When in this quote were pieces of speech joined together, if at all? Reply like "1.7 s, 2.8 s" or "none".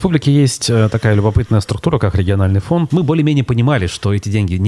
2.9 s